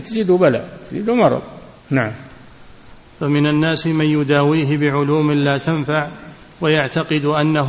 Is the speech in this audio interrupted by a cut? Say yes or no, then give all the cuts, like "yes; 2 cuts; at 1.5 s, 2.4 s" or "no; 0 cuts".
yes; 1 cut; at 1.8 s